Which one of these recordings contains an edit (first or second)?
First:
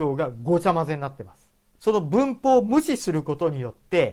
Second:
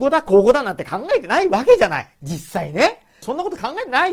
second